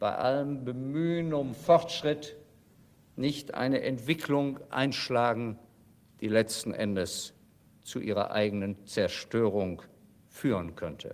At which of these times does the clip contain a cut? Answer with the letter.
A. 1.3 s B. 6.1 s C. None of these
C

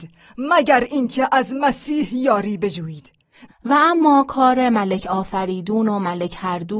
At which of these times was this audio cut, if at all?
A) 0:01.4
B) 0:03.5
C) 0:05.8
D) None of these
B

